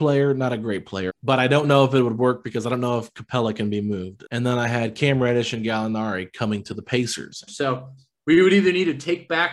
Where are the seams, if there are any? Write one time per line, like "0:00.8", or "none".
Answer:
0:01.1
0:04.2
0:07.5

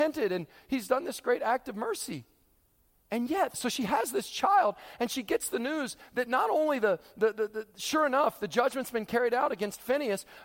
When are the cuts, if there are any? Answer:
0:03.5

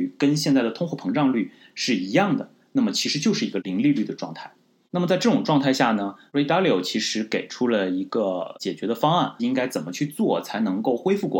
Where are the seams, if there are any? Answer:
0:04.8
0:09.4

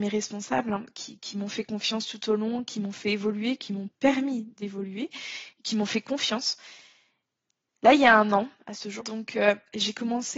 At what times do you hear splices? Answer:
0:07.7
0:09.0

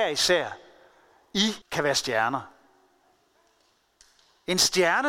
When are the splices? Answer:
0:01.6

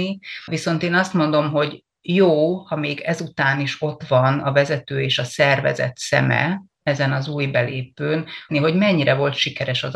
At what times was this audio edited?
0:06.7
0:08.5

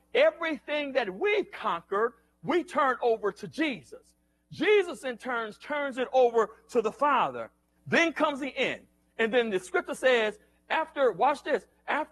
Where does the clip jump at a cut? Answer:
0:07.8
0:09.1

